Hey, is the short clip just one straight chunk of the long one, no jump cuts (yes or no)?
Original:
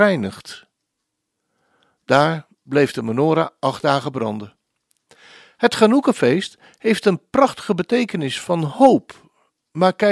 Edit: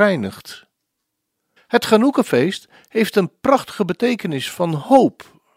no